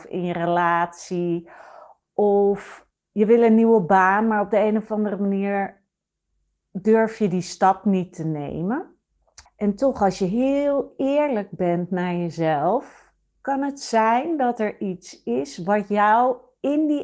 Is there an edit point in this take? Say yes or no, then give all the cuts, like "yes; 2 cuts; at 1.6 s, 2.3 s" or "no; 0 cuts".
yes; 2 cuts; at 2.0 s, 9.5 s